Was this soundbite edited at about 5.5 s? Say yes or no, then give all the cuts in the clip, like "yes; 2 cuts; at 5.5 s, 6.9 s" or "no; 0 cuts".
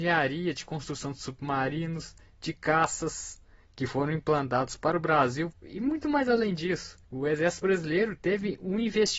yes; 2 cuts; at 5.5 s, 7.0 s